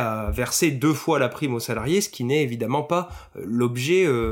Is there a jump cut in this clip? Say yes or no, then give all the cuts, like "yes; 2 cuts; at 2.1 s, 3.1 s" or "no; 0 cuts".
no; 0 cuts